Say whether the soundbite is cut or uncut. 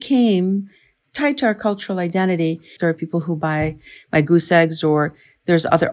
cut